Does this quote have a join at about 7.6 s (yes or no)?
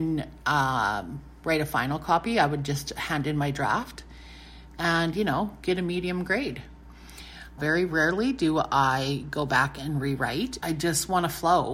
yes